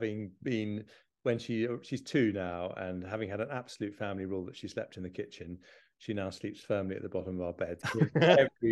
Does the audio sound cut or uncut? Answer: cut